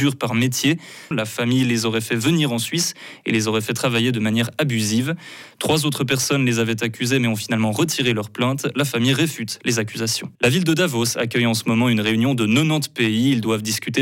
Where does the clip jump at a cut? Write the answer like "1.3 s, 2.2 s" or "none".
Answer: 1.1 s, 10.4 s

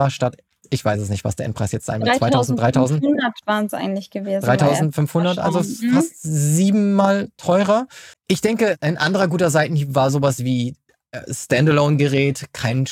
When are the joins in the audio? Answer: 8.1 s

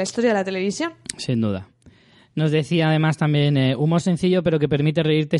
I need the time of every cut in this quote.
none

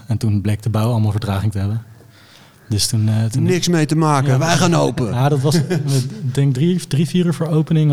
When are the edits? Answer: none

